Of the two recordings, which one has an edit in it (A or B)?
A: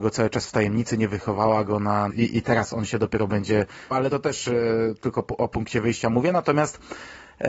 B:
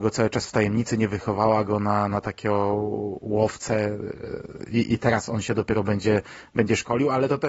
A